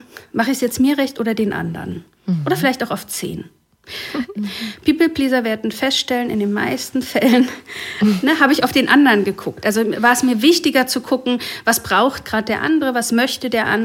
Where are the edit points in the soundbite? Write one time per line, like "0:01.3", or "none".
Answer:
0:04.4